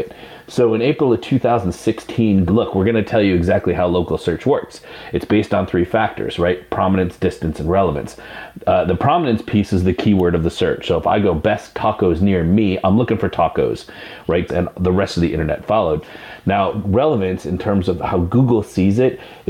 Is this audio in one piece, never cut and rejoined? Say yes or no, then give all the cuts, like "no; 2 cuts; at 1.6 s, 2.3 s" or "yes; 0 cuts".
no; 2 cuts; at 2.5 s, 14.5 s